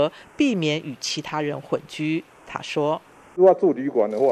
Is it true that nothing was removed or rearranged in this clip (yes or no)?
yes